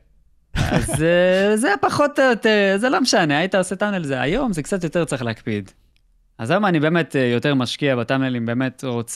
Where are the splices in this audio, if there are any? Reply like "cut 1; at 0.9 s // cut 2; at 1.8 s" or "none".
none